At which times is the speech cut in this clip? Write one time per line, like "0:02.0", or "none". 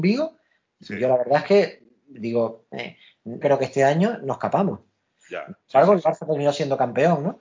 0:03.4